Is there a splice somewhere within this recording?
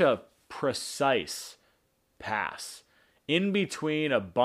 no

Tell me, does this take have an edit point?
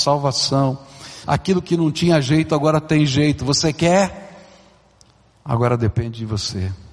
yes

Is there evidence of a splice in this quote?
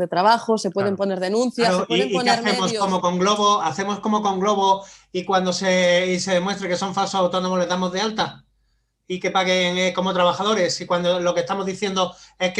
no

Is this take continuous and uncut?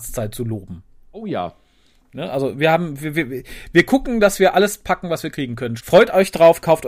no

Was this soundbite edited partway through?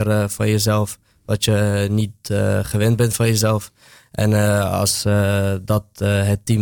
no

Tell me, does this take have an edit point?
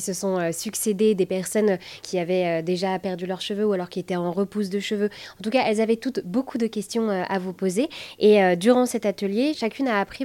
no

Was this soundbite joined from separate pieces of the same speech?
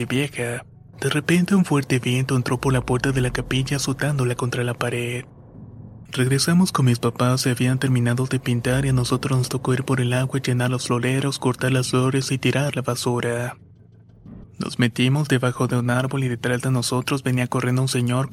yes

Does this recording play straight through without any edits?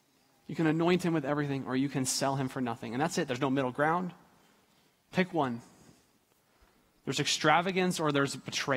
yes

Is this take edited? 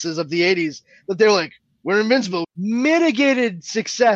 yes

